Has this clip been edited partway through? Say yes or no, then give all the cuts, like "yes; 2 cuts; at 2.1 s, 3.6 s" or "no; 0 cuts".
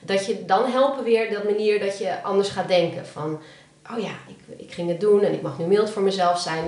yes; 1 cut; at 4.3 s